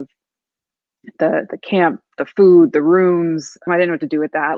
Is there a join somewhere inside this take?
yes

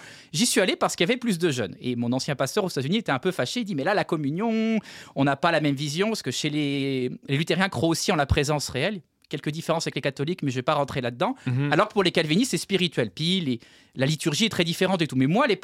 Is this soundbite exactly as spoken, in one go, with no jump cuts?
yes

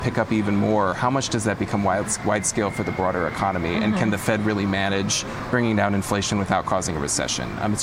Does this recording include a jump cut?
no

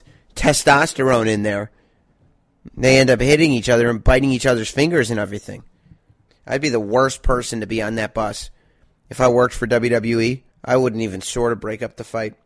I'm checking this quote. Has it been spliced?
yes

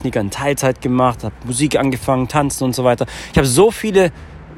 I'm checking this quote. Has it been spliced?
no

